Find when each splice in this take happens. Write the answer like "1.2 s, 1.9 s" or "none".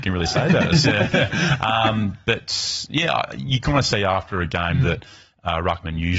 none